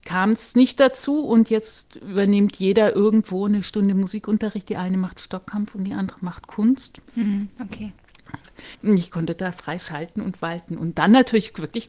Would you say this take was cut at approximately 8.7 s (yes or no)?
yes